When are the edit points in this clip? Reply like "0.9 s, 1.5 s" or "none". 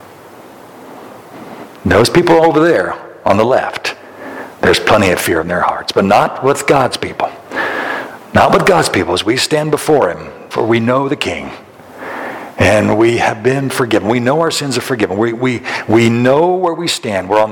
10.5 s